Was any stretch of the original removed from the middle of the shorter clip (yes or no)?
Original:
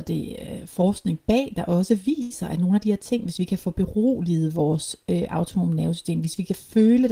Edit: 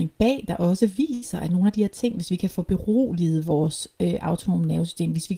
no